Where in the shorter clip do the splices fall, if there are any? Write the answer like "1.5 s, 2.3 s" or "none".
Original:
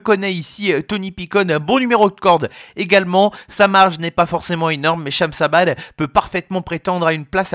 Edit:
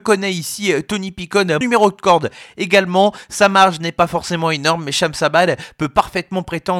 1.6 s